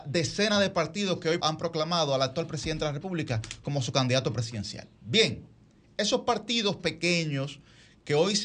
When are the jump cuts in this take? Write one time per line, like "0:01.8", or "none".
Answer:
0:01.4
0:04.9

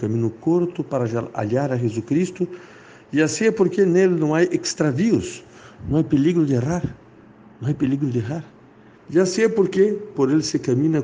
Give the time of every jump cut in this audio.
0:08.9
0:10.1

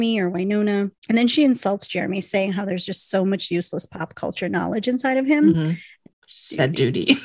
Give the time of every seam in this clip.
0:01.0
0:06.1

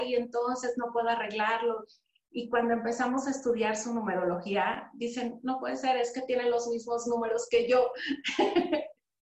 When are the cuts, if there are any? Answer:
none

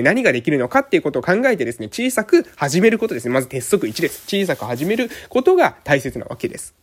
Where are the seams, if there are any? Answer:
none

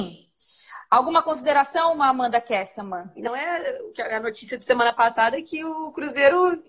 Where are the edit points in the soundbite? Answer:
0:03.3

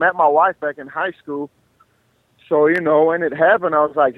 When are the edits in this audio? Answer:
none

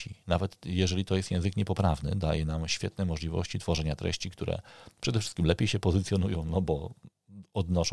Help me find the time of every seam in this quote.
none

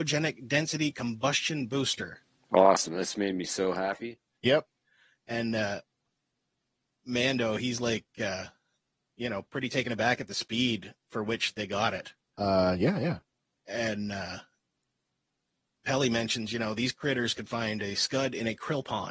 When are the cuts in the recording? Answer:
none

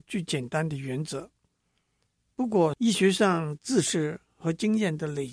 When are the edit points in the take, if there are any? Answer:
0:02.7

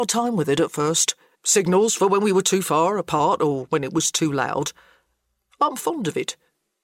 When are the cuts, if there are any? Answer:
0:01.3

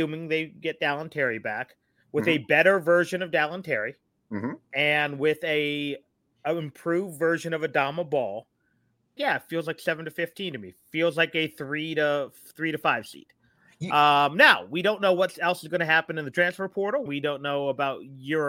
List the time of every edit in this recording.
0:09.2
0:17.1

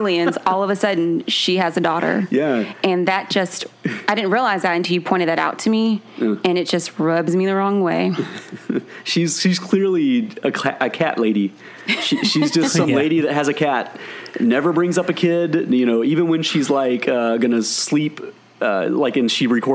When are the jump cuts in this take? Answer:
none

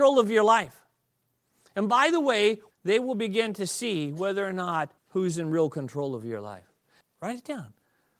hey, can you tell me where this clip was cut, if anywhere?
0:02.7
0:05.0
0:07.0

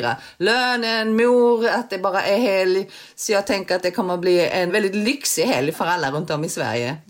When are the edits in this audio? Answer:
0:04.7
0:05.7

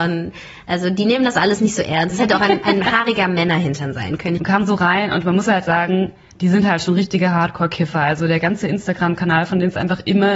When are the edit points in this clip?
0:02.1
0:04.4

